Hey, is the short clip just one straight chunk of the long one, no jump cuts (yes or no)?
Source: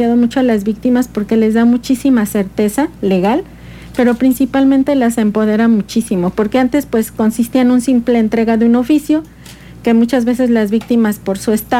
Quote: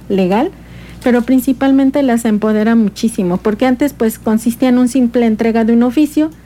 yes